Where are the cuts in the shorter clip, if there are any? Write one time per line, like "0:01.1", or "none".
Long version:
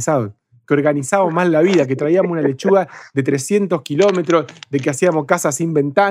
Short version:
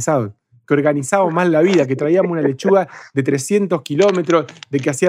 none